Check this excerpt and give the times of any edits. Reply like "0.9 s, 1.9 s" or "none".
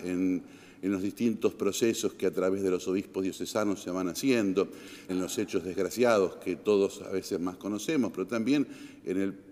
5.1 s